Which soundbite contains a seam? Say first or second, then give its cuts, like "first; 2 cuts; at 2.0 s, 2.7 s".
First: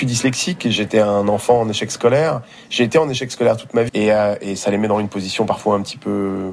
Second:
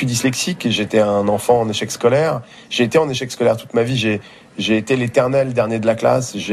first; 1 cut; at 3.9 s